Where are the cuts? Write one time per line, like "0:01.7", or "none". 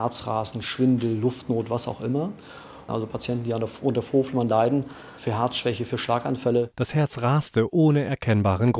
0:02.9
0:05.2
0:06.7